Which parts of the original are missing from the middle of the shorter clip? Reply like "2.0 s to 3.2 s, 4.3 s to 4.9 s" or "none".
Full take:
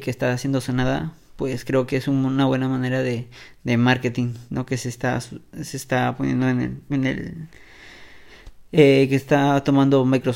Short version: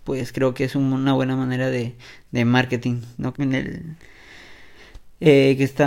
4.7 s to 6.8 s